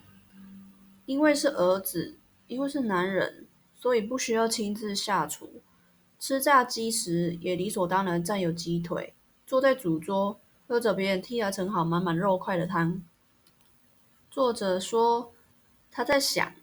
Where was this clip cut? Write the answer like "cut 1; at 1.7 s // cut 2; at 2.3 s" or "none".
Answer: none